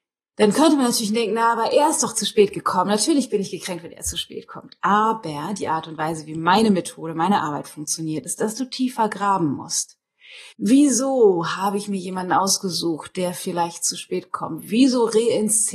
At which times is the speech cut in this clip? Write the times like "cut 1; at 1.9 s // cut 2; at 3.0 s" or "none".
cut 1; at 10.5 s